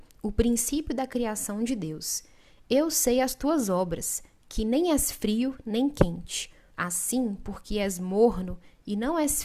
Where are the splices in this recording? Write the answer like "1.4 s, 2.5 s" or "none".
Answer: 6.7 s